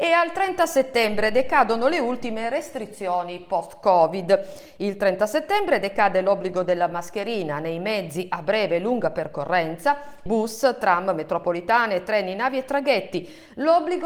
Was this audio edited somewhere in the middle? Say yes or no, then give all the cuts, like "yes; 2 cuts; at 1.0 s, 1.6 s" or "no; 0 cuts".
yes; 1 cut; at 10.3 s